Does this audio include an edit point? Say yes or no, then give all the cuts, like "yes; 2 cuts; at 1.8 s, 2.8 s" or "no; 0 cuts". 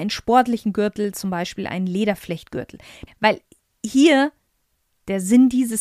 yes; 1 cut; at 3.1 s